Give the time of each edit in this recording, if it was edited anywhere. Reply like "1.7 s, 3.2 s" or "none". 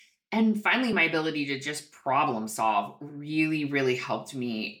none